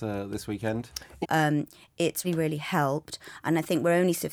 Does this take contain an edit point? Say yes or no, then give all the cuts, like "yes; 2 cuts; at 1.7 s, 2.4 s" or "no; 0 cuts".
yes; 2 cuts; at 1.2 s, 2.2 s